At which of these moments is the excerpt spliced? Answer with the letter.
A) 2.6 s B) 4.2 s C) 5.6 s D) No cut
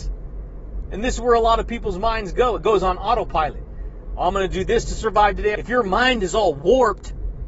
C